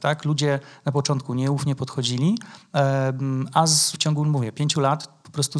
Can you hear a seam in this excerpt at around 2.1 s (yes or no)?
no